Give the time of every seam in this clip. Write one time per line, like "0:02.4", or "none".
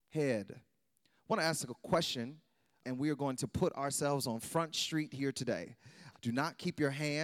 0:02.8
0:06.1